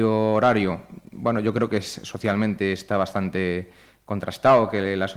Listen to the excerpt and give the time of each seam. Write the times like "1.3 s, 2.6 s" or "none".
none